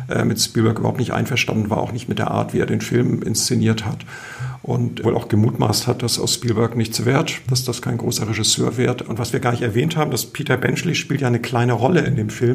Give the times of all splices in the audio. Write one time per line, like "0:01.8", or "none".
0:05.0
0:09.1